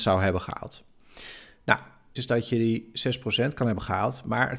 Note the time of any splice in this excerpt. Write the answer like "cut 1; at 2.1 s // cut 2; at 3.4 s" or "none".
cut 1; at 2.2 s